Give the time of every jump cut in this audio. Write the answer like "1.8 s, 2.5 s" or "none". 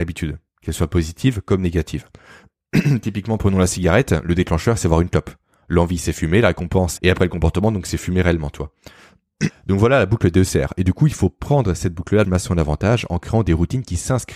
7.0 s, 9.5 s, 12.2 s